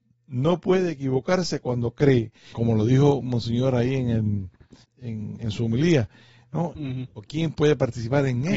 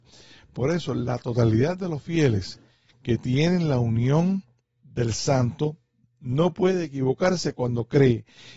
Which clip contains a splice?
first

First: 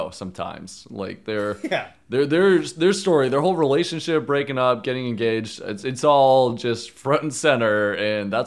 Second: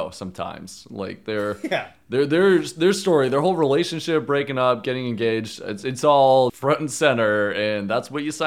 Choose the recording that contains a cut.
second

